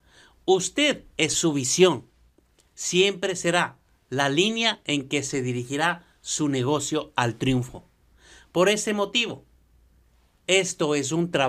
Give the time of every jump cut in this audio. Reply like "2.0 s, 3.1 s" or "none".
none